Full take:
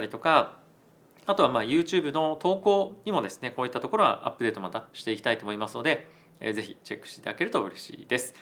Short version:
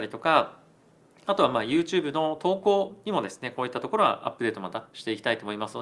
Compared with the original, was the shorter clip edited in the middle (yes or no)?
no